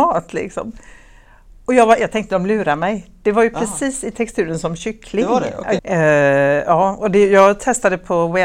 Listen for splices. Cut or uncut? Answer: cut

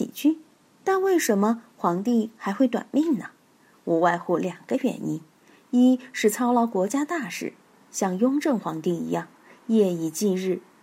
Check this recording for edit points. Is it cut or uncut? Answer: uncut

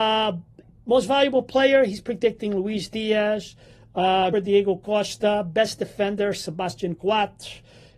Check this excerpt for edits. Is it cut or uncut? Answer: cut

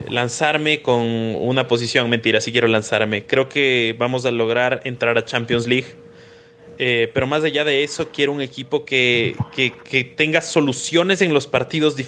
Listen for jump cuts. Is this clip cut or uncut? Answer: uncut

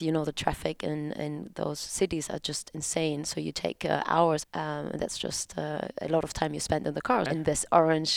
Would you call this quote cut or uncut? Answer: cut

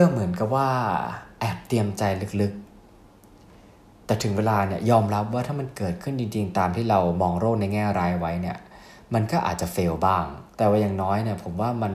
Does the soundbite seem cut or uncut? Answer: cut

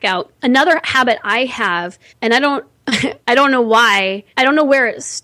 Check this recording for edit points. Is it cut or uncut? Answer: uncut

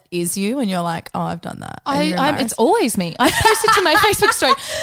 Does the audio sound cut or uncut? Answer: uncut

